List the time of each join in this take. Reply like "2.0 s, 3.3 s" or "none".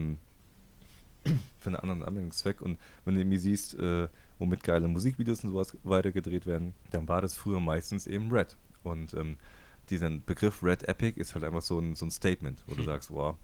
6.8 s